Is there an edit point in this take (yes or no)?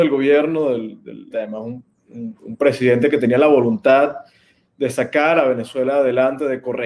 yes